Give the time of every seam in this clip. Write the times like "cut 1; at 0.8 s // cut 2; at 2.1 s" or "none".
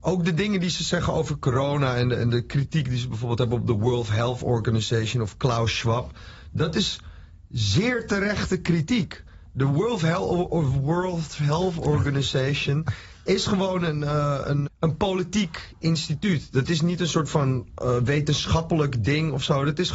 cut 1; at 14.7 s